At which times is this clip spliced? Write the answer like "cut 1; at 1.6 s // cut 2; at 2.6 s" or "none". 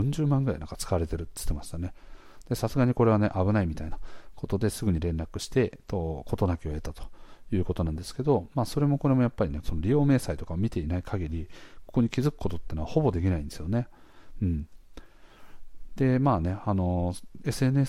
cut 1; at 9.6 s